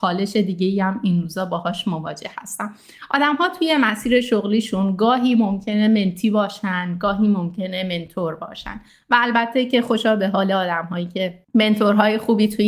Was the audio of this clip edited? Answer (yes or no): yes